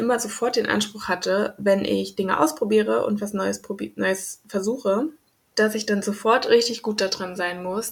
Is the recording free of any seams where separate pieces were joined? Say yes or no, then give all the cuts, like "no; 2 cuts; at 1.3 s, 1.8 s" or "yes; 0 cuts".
yes; 0 cuts